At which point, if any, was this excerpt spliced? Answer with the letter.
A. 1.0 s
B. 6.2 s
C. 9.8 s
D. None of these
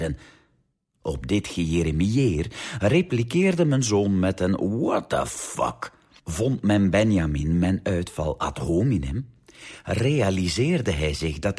B